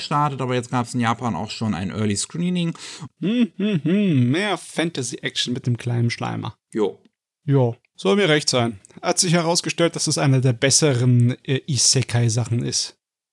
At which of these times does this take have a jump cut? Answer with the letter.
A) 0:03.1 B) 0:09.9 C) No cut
A